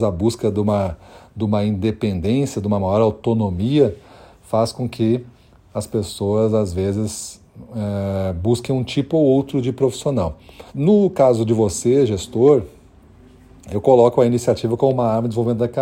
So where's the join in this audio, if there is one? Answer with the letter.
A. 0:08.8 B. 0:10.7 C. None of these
B